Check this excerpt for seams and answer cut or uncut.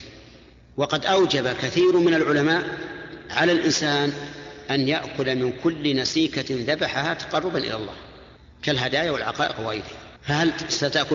cut